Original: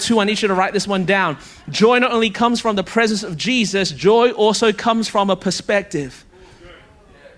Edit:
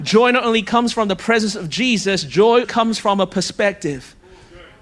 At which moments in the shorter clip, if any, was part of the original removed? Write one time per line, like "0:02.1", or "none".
0:02.6